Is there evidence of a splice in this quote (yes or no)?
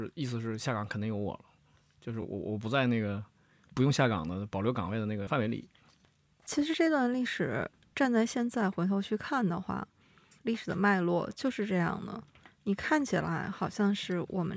no